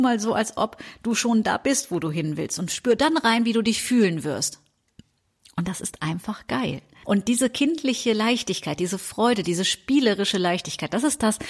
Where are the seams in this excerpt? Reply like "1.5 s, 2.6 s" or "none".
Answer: 7.0 s